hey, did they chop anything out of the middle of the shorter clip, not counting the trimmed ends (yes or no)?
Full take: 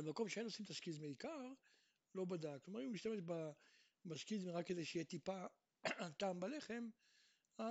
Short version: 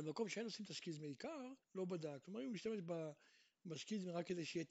yes